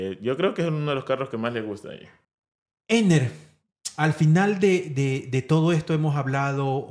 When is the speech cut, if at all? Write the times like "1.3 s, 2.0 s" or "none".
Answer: none